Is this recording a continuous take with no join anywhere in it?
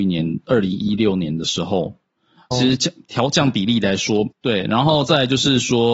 no; 2 cuts; at 2.5 s, 4.3 s

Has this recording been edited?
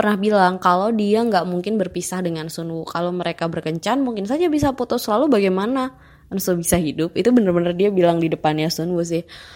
no; 0 cuts

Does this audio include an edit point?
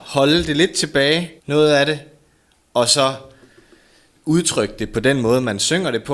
yes; 1 cut; at 1.4 s

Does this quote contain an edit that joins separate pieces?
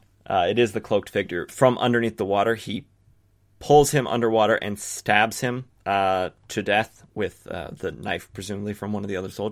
yes; 1 cut; at 1.5 s

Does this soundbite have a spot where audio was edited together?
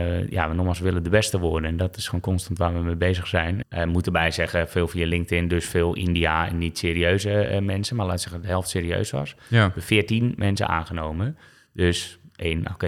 yes; 1 cut; at 3.6 s

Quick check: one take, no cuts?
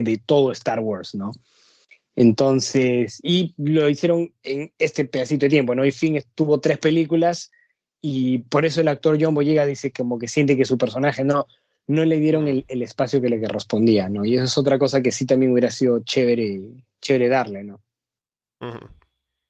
yes; 0 cuts

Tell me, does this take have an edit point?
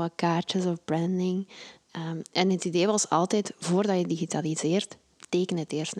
no; 0 cuts

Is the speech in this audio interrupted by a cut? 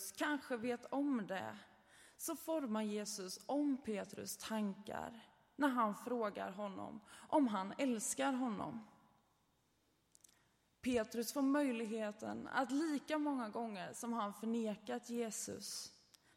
no; 0 cuts

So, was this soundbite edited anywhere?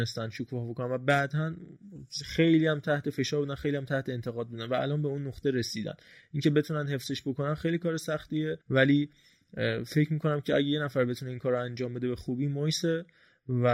yes; 1 cut; at 8.6 s

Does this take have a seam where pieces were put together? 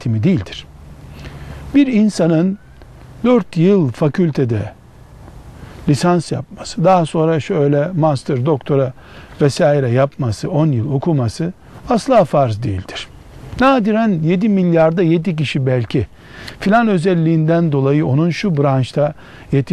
no; 0 cuts

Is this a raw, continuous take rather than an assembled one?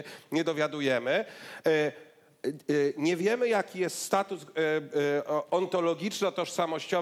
yes; 0 cuts

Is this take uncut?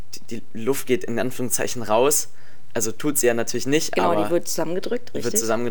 yes; 0 cuts

